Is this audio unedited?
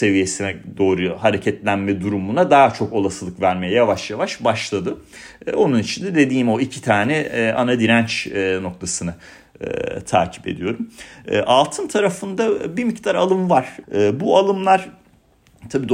no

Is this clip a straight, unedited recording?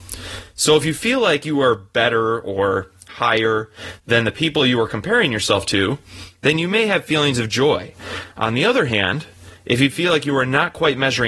yes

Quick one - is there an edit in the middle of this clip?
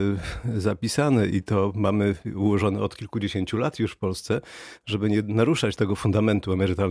yes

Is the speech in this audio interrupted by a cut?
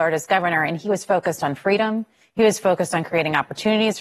no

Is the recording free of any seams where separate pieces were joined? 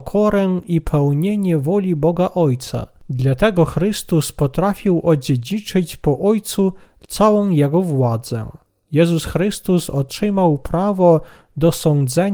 yes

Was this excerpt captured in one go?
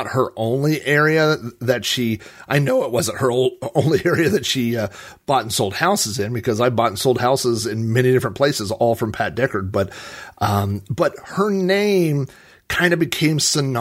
yes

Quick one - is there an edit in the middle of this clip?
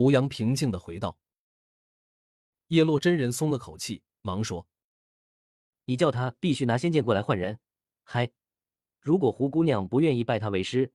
no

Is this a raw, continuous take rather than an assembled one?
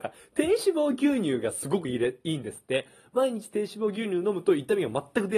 yes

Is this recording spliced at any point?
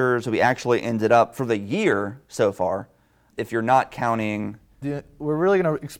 yes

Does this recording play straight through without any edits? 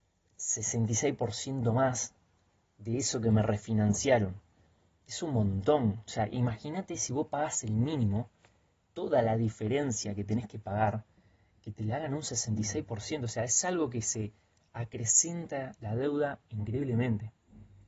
yes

